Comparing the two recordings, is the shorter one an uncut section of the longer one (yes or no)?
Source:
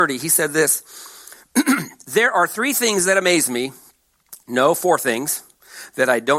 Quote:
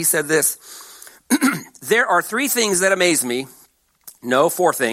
yes